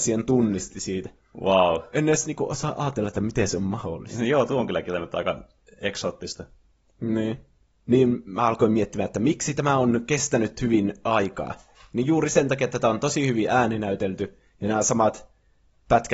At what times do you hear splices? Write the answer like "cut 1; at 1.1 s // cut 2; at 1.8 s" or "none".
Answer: none